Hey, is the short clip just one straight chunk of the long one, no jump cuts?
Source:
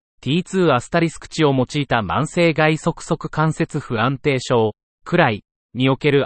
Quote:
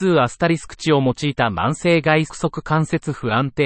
no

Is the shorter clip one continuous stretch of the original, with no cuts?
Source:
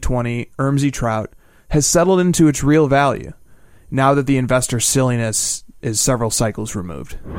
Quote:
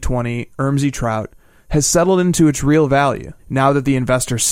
no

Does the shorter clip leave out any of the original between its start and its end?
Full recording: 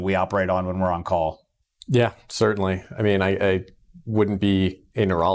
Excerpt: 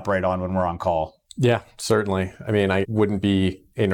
yes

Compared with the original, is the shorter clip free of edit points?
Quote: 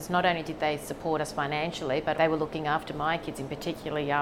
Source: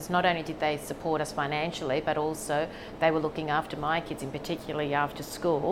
no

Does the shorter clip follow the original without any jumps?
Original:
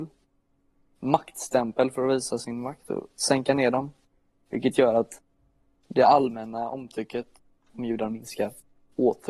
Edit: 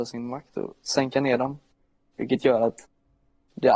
yes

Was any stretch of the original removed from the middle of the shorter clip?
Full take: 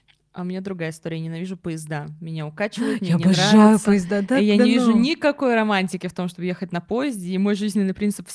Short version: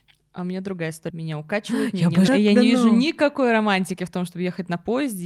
yes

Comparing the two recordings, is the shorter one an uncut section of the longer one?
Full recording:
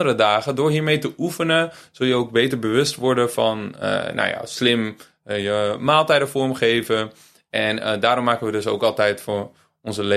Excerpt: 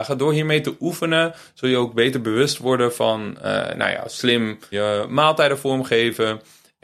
no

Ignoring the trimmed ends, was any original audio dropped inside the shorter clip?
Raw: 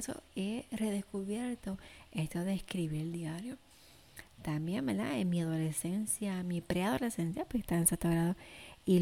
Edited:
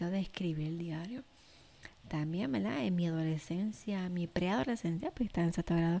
no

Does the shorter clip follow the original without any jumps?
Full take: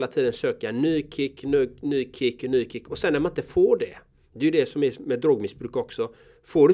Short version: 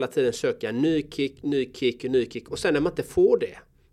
no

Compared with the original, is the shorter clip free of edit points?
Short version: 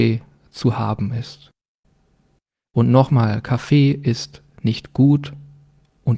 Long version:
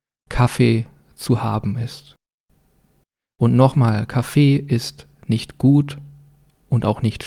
yes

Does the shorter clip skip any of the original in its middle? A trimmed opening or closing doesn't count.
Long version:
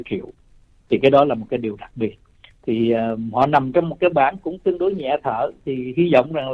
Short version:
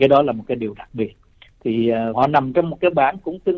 yes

